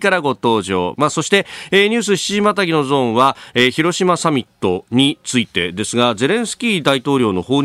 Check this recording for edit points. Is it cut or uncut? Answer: cut